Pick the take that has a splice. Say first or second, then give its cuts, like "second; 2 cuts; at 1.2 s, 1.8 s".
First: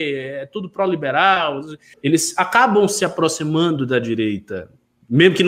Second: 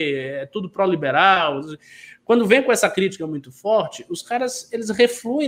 first; 1 cut; at 1.9 s